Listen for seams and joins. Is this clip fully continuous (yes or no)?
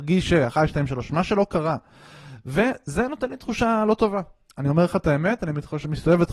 yes